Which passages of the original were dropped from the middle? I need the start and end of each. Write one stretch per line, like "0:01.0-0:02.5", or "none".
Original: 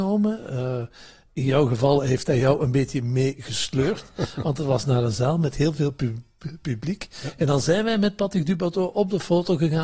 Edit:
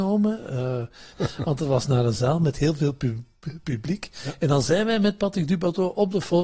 0:01.1-0:04.1